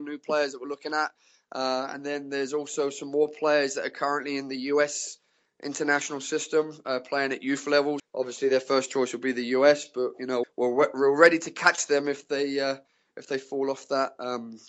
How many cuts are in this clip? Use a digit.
2